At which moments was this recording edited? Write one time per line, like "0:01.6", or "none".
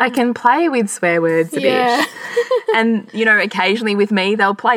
none